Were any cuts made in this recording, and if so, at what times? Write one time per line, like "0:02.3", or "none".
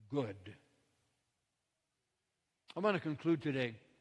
none